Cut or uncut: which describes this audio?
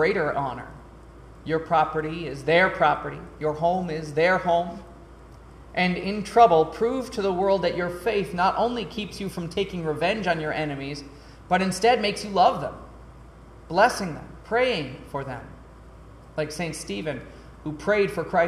uncut